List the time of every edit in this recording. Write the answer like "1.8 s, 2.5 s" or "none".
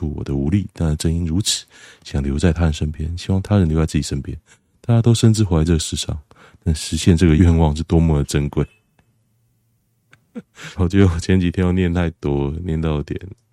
7.4 s, 10.7 s